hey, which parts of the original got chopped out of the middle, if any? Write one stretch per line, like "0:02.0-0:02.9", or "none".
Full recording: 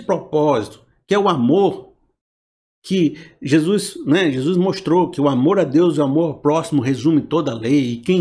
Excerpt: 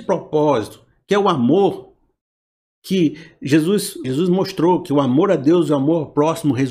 0:04.0-0:04.3